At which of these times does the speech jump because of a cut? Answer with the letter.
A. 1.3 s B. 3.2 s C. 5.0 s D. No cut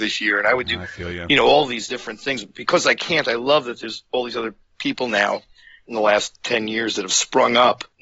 D